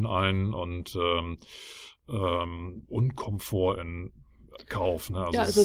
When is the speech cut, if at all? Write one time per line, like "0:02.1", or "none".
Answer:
0:02.8